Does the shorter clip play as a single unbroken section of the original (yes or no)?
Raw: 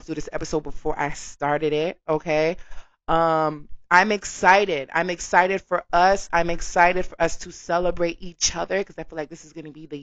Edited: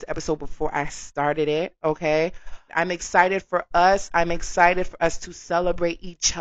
no